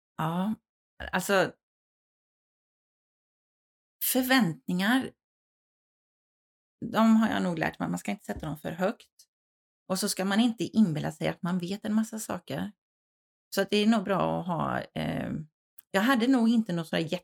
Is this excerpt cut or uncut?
uncut